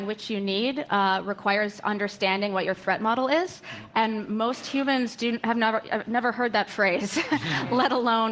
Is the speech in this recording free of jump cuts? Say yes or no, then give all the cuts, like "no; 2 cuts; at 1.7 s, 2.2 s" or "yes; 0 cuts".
yes; 0 cuts